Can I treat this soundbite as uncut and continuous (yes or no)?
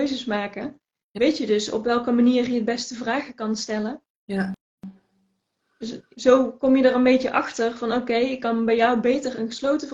yes